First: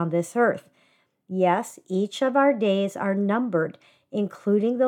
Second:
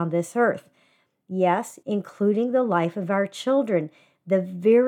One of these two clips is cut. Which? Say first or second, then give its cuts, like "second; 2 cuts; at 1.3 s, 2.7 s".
second; 1 cut; at 1.8 s